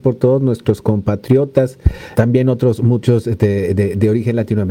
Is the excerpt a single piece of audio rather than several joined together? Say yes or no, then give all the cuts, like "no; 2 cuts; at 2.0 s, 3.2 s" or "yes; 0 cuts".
no; 1 cut; at 2.1 s